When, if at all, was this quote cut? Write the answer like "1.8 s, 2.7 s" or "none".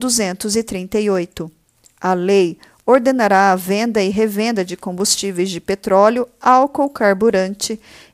none